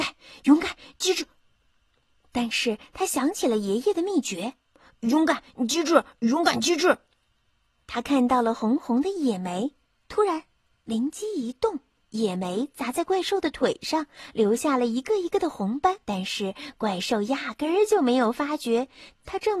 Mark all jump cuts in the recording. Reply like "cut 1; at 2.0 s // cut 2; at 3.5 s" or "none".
cut 1; at 12.0 s // cut 2; at 16.0 s